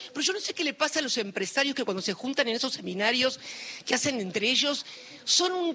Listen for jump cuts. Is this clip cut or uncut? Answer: uncut